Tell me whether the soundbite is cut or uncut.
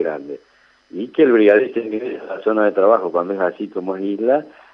uncut